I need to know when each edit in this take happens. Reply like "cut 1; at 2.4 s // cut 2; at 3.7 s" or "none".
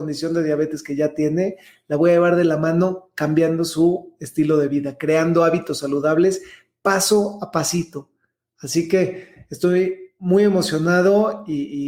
none